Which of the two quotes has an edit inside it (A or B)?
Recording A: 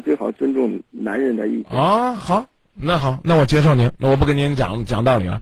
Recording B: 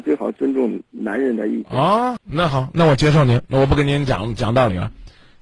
B